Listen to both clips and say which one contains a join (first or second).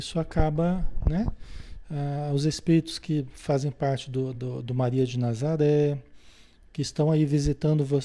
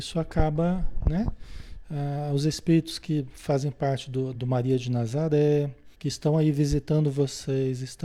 second